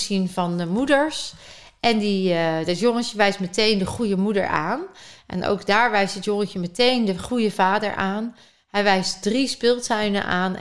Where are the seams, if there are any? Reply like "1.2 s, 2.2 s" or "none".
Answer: 5.2 s

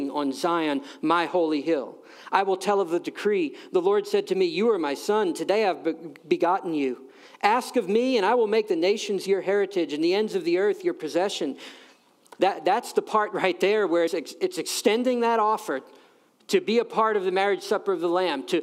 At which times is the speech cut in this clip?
14.1 s

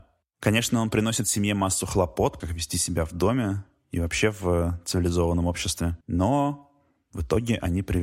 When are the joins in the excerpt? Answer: 2.4 s, 6.0 s

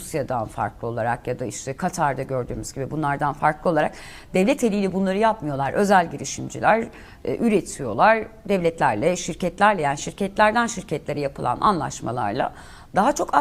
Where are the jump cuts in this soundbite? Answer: none

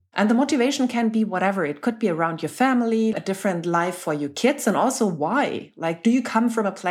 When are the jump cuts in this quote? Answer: 3.1 s

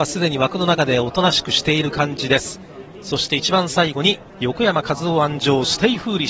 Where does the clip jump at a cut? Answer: 4.3 s

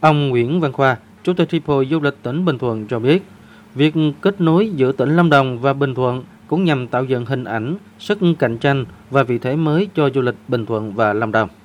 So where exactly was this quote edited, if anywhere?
none

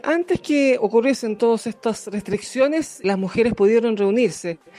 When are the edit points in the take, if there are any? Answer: 3.0 s

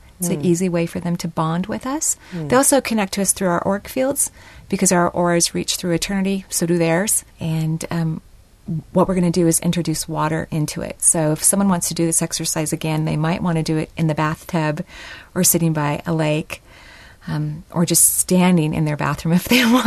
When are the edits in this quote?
7.3 s

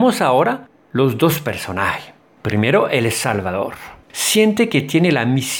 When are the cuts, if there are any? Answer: 4.0 s

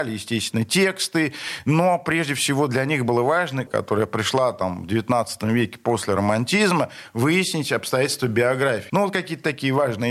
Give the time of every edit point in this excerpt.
3.7 s, 8.9 s

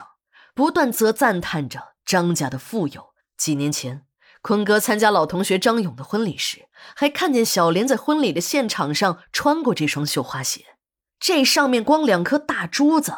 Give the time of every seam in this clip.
0.9 s, 3.2 s, 11.1 s

